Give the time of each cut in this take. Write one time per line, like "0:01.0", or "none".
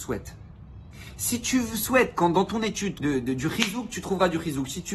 0:03.0